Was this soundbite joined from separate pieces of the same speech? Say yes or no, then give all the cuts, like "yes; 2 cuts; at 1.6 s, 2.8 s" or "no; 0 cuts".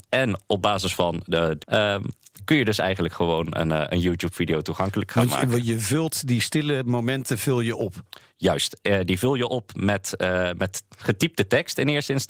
yes; 1 cut; at 1.6 s